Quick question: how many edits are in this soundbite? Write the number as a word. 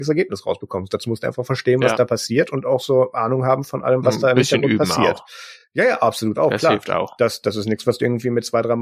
zero